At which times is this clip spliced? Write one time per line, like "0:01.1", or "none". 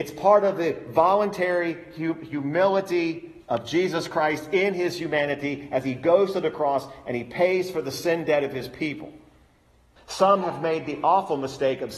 0:10.0

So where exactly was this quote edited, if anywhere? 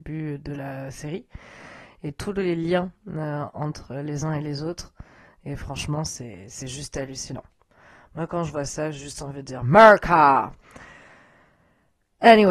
none

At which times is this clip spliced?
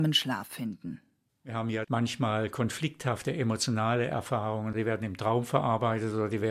0:01.3

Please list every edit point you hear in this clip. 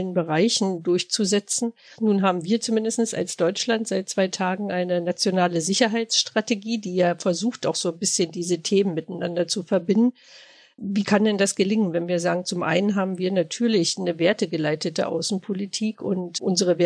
0:02.0

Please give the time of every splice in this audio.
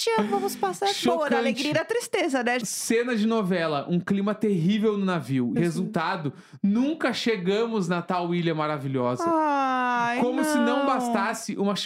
0:02.6
0:05.6

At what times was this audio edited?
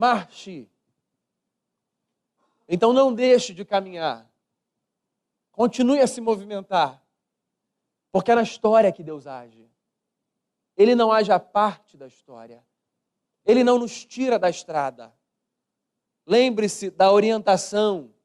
0:08.1

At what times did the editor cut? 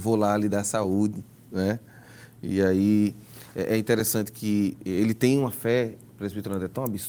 none

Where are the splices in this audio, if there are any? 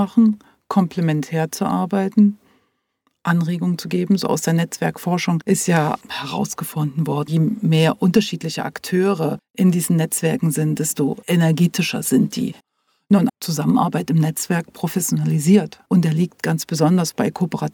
0:13.3
0:15.9

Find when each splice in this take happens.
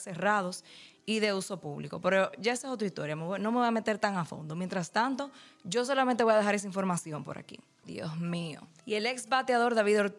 0:07.8

